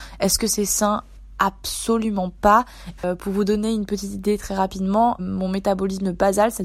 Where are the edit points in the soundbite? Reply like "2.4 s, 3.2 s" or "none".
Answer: 3.0 s, 5.2 s